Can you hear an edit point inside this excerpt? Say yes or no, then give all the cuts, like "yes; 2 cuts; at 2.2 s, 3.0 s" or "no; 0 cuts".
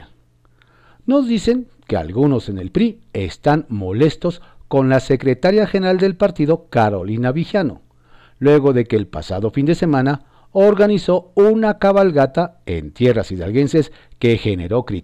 no; 0 cuts